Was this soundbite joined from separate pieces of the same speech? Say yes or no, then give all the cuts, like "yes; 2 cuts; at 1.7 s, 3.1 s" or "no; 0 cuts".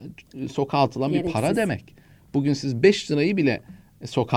no; 0 cuts